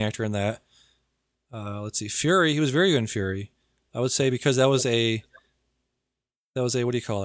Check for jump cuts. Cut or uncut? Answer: uncut